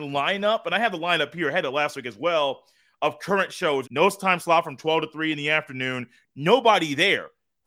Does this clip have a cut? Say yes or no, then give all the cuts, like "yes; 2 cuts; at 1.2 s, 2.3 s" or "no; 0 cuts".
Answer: yes; 2 cuts; at 3.8 s, 6.2 s